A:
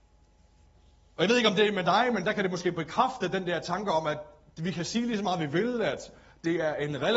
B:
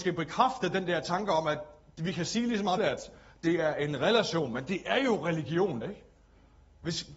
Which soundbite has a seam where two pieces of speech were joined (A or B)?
B